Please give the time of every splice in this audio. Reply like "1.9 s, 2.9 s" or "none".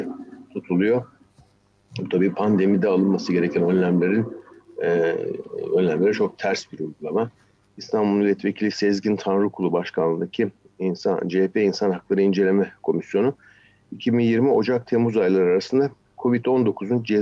7.7 s